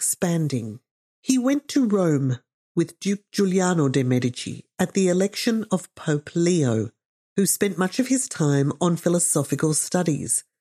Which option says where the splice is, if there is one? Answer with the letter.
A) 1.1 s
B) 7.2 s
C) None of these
A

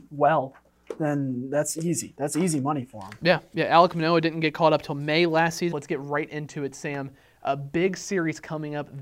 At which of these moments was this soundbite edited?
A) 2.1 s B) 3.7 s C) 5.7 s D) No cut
C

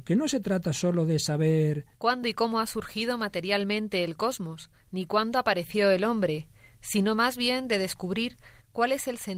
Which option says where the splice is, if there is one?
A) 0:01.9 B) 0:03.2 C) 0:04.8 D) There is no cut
A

